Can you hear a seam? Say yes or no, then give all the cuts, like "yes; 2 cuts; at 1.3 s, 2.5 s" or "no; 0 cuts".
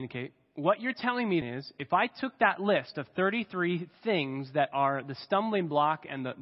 yes; 1 cut; at 1.4 s